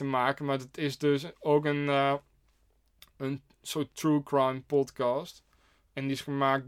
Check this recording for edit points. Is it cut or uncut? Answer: uncut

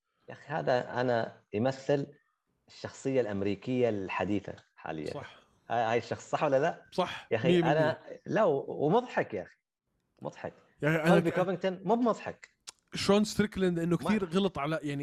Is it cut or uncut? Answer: uncut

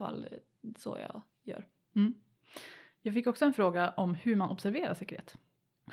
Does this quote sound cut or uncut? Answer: uncut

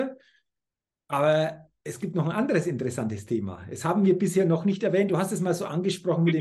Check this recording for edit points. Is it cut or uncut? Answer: uncut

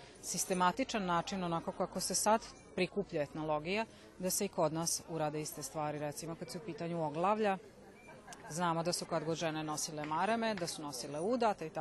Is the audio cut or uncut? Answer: uncut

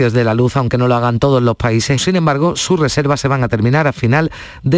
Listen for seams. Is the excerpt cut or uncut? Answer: cut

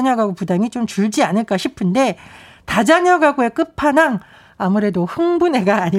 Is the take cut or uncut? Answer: uncut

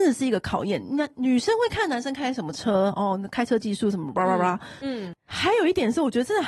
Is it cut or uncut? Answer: cut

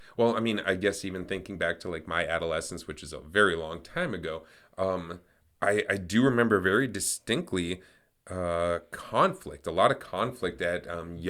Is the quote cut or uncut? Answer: uncut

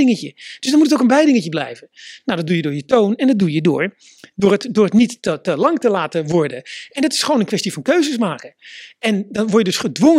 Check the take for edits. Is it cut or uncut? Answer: uncut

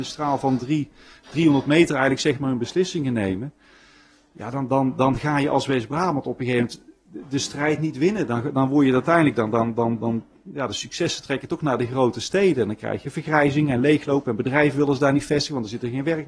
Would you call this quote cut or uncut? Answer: uncut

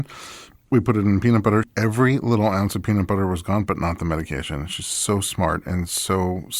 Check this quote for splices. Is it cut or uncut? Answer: uncut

